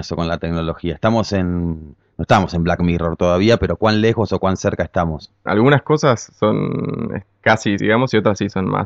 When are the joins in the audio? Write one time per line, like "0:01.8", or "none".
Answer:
0:05.5
0:07.8

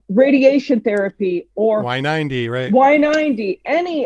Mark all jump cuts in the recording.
none

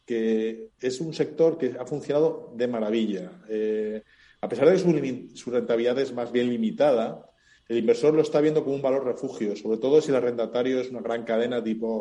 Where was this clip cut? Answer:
none

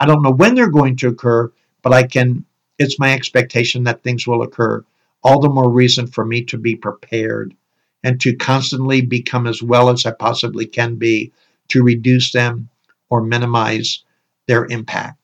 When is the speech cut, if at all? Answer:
none

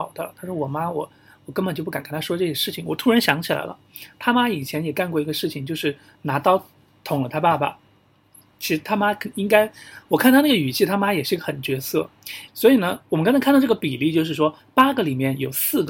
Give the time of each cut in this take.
0:12.5

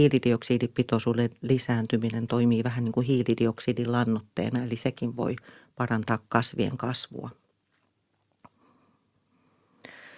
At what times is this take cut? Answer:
none

